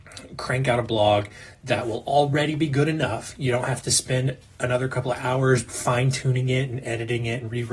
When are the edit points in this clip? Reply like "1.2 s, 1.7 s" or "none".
5.7 s